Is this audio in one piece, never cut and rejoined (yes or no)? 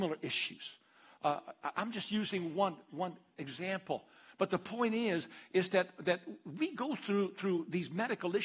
yes